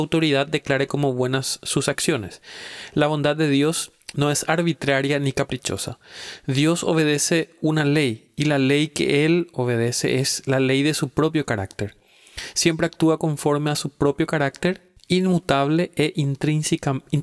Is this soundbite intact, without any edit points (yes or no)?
no